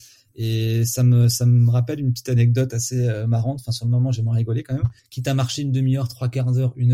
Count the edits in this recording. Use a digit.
1